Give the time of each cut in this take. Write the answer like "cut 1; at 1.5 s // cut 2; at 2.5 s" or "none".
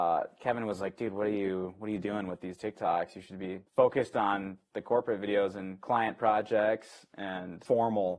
cut 1; at 3.7 s